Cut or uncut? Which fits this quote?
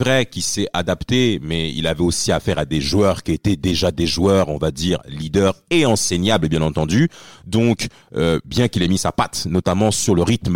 uncut